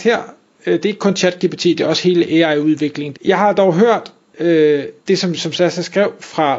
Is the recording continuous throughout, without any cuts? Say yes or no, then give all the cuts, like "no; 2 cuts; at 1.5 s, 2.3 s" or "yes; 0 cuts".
no; 2 cuts; at 3.1 s, 5.0 s